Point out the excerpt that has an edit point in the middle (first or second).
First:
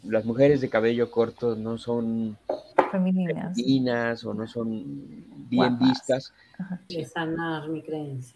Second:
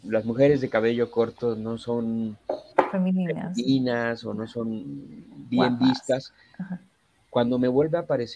first